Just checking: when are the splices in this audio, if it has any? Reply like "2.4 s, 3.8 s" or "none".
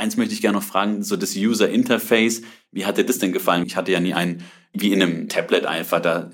3.6 s